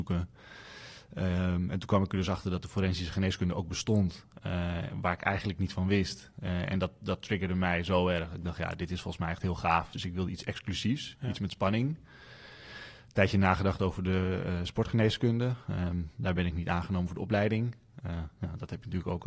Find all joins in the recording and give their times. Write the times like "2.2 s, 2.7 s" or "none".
9.9 s